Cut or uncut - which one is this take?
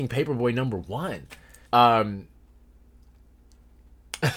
cut